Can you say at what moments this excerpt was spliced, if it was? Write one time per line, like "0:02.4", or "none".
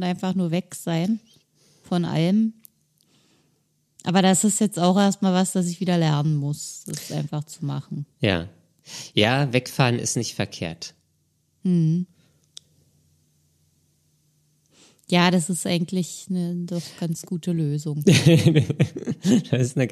none